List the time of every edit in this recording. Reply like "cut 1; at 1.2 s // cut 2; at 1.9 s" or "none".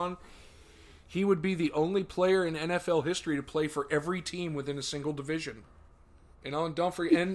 cut 1; at 6.3 s